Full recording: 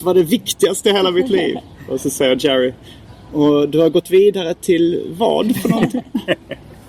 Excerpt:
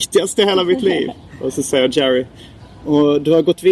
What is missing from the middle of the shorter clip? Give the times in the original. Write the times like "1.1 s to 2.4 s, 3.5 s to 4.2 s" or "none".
none